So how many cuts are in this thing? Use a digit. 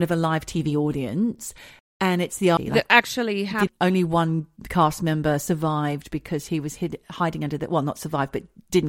2